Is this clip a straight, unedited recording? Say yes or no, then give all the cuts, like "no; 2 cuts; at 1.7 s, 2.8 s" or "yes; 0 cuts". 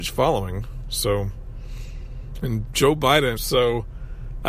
no; 1 cut; at 3.4 s